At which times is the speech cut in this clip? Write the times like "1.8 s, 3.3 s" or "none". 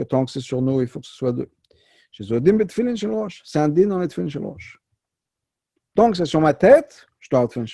none

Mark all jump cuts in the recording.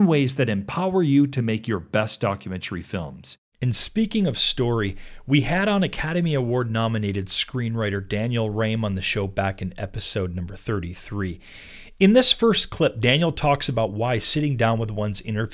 3.4 s

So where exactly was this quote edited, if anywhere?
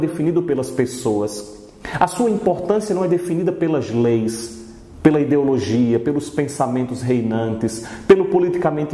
none

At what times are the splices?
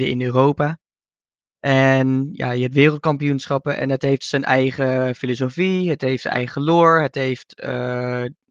none

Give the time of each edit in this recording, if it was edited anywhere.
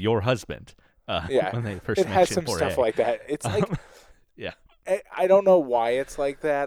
none

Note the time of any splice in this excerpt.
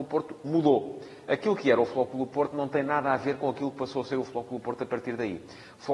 none

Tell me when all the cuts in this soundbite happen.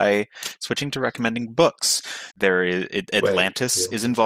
2.3 s

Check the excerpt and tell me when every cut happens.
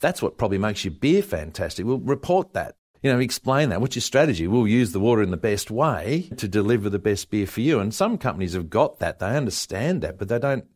none

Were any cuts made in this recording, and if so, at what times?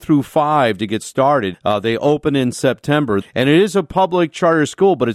1.5 s, 3.2 s

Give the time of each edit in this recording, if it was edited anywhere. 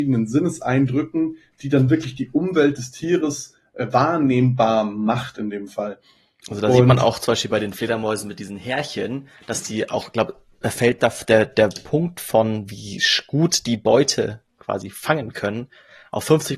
none

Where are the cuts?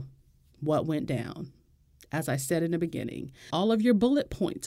3.5 s

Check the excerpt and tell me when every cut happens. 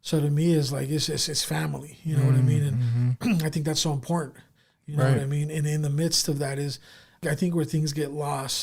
none

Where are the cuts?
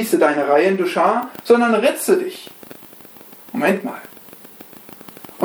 none

